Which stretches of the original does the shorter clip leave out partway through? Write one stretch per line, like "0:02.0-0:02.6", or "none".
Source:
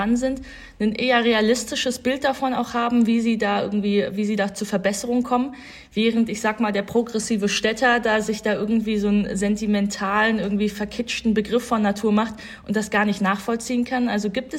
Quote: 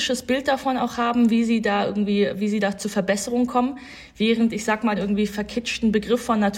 0:06.7-0:10.4

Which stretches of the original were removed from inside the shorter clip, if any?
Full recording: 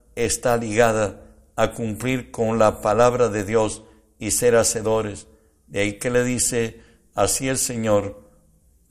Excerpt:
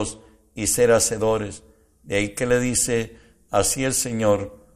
none

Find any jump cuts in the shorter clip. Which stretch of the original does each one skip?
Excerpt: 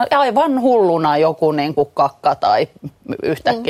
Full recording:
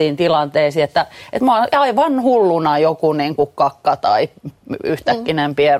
none

